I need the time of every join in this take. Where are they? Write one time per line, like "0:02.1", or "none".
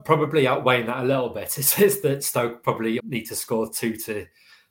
0:03.0